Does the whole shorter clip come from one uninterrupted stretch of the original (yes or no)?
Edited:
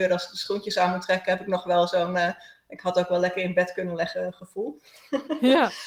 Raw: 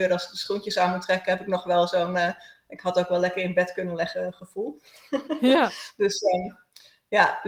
yes